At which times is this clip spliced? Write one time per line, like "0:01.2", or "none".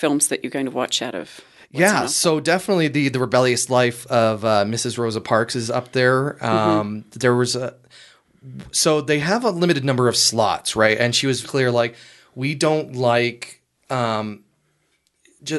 0:11.4